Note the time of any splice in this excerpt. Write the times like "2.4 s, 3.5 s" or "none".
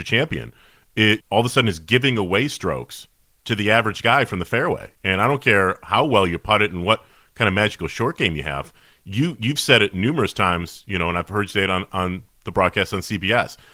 1.2 s

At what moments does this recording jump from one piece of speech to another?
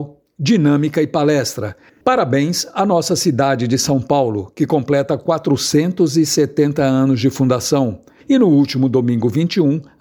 1.9 s, 8.2 s

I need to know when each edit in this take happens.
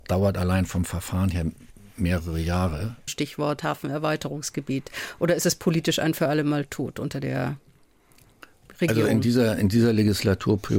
3.1 s

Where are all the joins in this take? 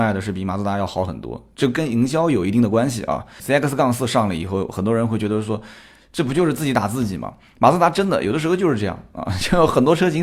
3.4 s

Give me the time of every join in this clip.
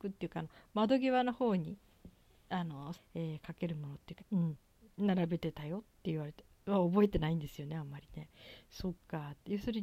2.9 s, 4.2 s

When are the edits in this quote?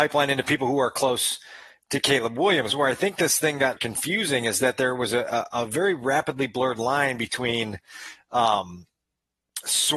3.8 s

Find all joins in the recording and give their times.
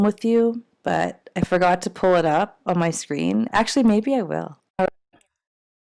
3.5 s, 4.6 s

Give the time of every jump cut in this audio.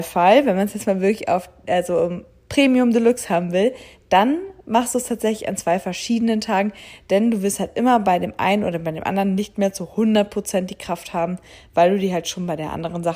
none

